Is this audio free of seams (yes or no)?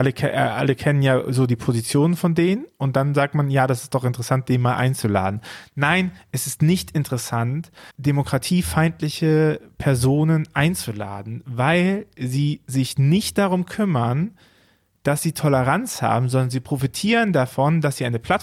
no